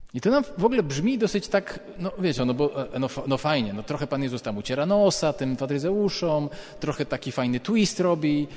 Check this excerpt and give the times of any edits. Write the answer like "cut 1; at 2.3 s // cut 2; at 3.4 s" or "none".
cut 1; at 2.4 s